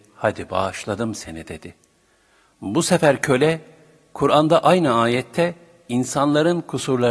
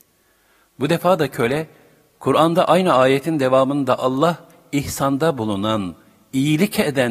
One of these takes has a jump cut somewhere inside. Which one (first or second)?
first